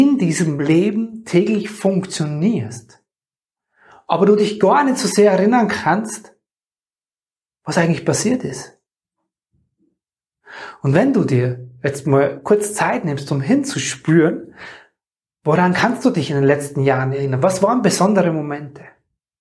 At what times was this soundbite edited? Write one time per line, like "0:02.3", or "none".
none

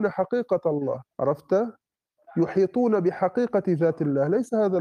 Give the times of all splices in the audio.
0:01.1

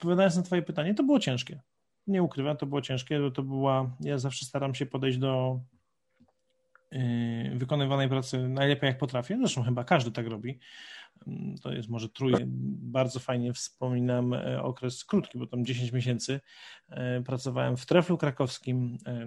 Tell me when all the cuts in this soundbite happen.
0:12.4
0:15.3

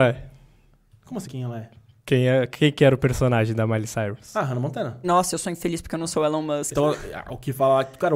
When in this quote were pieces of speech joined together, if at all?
0:01.2
0:05.0
0:06.7

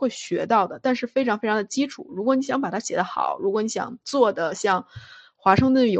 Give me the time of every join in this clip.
none

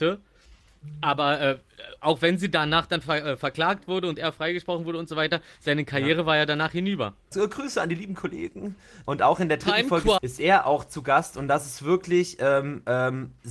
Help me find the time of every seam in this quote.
0:07.3
0:09.0
0:10.2

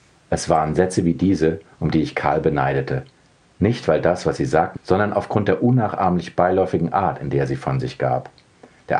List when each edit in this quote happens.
0:04.7

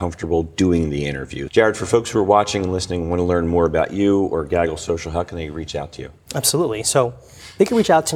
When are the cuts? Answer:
0:01.5

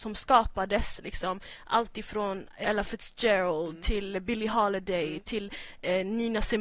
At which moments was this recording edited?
0:02.6

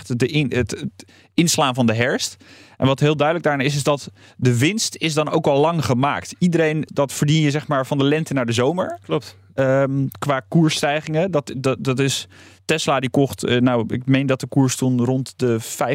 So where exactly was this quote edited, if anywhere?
0:06.9

